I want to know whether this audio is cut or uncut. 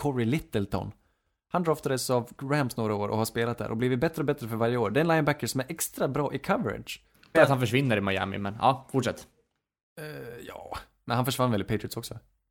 cut